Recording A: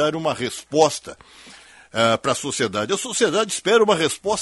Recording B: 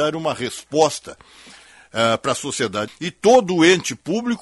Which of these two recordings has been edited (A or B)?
B